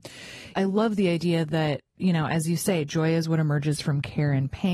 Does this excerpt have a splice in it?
no; 0 cuts

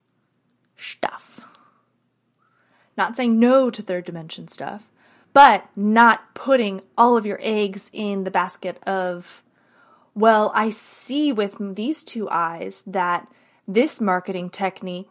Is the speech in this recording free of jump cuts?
no; 1 cut; at 2.9 s

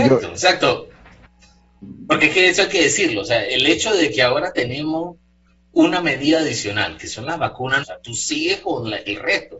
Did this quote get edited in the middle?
yes; 1 cut; at 7.8 s

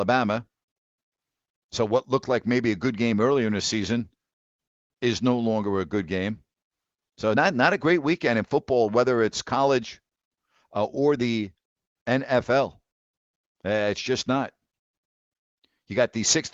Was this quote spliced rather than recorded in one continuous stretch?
no; 0 cuts

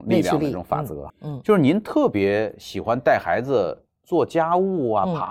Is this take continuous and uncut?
no; 1 cut; at 1.1 s

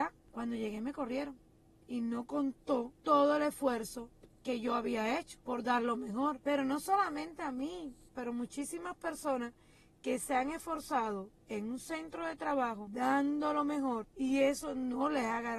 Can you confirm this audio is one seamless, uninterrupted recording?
no; 1 cut; at 8.1 s

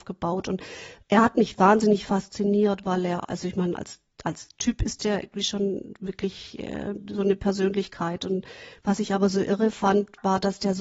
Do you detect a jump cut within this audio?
no; 0 cuts

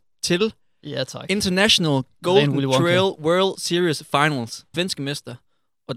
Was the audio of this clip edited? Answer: yes; 1 cut; at 4.7 s

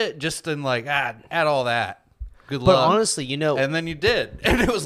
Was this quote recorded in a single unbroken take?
yes; 0 cuts

